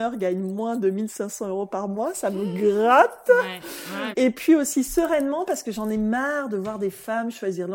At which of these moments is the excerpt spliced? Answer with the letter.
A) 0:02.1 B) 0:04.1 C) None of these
B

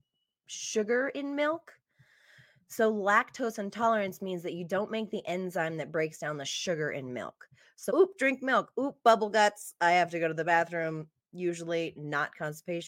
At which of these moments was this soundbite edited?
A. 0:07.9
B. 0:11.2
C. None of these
A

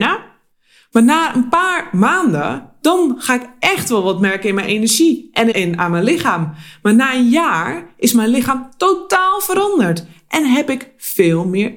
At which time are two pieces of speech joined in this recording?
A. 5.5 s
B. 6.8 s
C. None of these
A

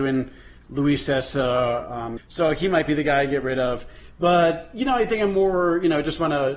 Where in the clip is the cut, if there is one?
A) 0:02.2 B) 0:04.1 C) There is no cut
A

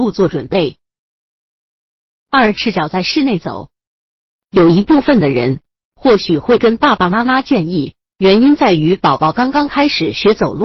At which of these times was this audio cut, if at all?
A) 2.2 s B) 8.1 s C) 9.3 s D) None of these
B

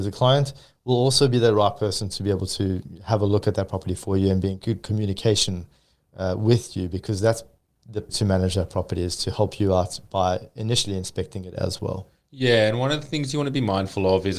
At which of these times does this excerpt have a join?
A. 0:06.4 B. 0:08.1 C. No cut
B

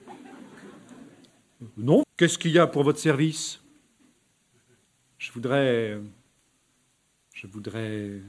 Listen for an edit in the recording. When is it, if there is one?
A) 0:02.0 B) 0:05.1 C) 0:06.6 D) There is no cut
A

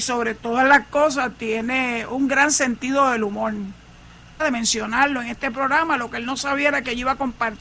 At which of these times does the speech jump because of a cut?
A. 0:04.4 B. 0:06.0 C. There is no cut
A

